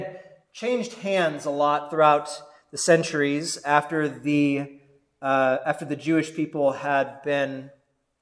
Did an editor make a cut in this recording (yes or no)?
no